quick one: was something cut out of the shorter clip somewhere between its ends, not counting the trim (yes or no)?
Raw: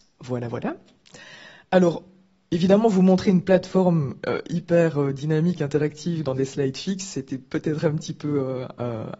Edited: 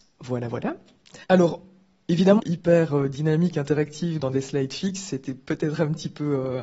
yes